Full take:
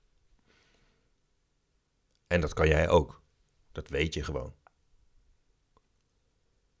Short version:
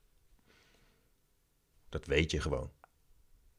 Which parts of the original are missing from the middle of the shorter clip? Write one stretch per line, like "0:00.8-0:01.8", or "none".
0:01.7-0:03.6